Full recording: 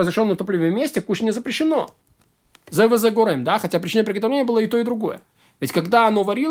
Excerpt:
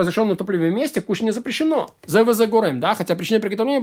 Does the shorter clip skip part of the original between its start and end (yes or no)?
yes